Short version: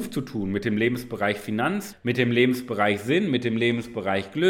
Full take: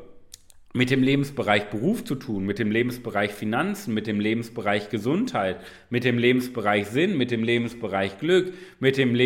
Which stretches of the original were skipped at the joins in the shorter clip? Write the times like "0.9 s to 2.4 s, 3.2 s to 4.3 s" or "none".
3.9 s to 5.8 s